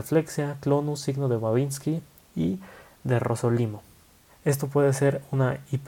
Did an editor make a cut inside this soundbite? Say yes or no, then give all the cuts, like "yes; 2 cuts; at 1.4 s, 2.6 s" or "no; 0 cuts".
yes; 1 cut; at 4.3 s